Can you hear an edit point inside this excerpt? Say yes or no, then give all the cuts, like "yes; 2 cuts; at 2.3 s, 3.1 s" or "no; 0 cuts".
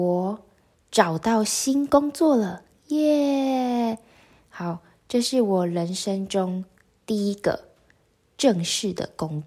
no; 0 cuts